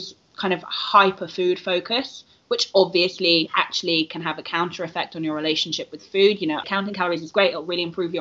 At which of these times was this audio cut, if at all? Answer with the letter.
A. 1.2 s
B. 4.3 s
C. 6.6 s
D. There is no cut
C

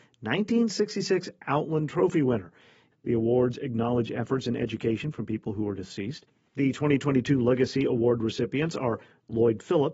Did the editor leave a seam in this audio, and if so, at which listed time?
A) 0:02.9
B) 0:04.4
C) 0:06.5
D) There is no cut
A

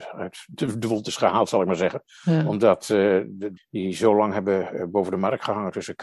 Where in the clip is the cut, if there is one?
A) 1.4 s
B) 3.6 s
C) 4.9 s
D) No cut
B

